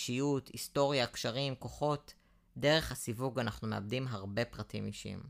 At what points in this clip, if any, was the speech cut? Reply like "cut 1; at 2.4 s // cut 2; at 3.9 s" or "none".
none